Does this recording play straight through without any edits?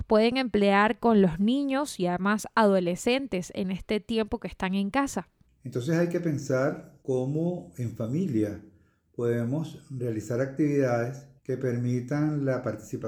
no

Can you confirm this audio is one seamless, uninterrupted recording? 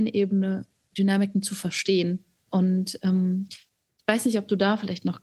yes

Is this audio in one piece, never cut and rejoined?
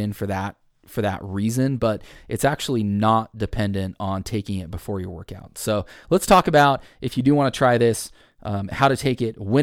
yes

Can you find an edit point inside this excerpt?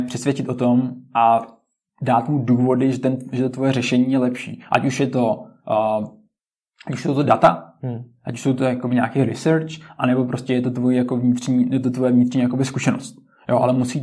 no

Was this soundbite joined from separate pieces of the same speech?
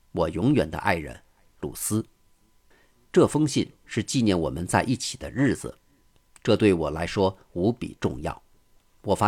yes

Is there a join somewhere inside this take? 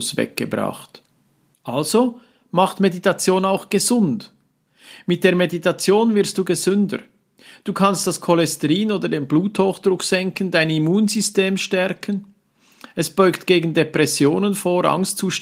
yes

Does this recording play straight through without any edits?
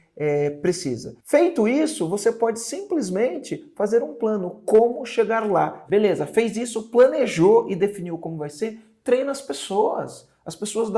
no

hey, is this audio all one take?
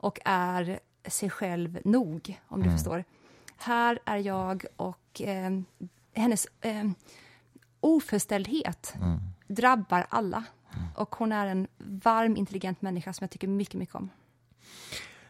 yes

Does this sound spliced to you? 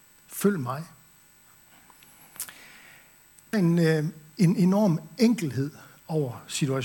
yes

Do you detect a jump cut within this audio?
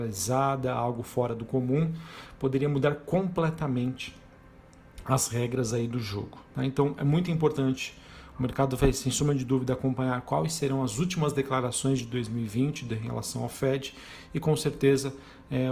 no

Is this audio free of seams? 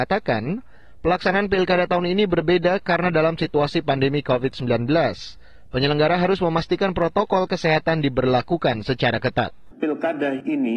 no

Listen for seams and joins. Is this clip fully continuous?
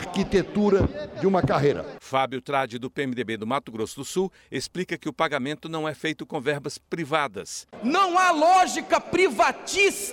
yes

